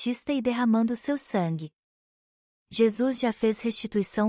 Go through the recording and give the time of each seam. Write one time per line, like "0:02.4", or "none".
none

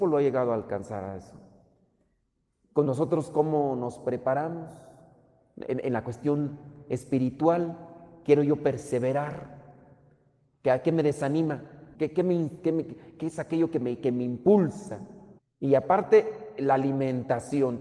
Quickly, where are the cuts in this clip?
0:11.9
0:15.4

